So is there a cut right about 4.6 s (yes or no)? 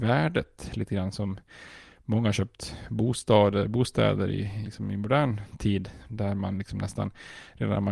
yes